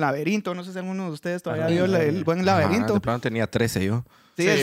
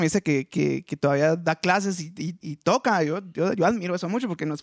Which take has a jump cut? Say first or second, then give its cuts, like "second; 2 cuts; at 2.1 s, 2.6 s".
second; 1 cut; at 2.4 s